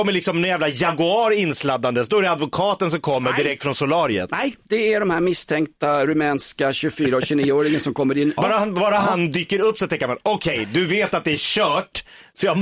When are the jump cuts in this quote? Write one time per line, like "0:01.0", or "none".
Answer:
0:08.4